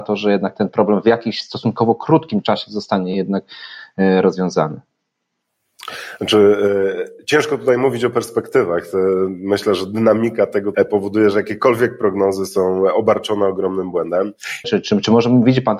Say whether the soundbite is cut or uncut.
cut